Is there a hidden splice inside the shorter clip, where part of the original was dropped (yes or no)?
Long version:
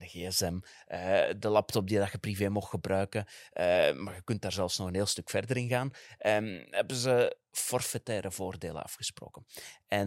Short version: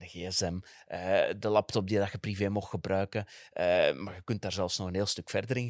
no